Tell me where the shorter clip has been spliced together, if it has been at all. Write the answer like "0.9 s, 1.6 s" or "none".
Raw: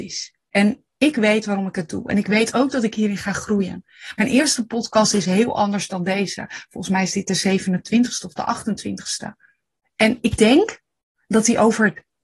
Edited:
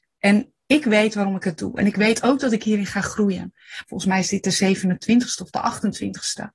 3.8 s

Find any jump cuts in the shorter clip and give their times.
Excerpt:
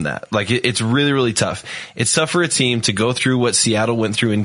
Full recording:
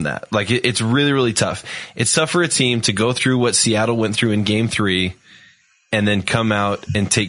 none

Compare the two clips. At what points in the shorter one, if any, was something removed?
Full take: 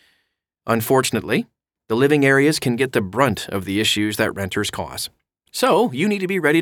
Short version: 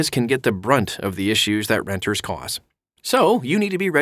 none

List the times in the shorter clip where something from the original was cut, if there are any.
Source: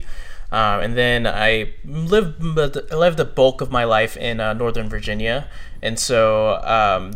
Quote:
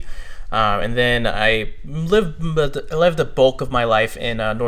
none

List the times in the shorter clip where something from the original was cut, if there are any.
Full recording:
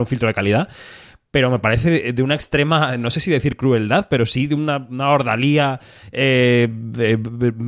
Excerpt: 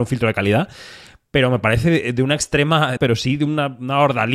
3.0 s

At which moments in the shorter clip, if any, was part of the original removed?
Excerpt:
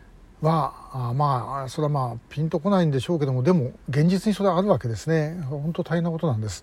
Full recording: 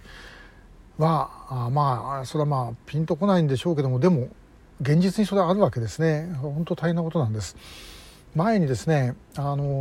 3.8 s

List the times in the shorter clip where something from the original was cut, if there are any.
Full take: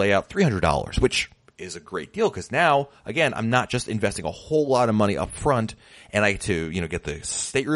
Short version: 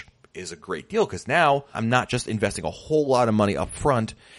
1.7 s

